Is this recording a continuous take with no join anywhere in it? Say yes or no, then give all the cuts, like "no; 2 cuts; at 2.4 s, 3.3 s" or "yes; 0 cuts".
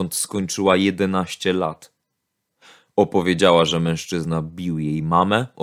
yes; 0 cuts